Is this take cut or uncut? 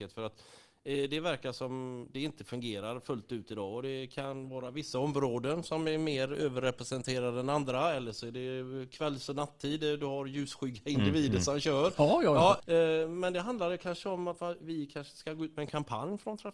uncut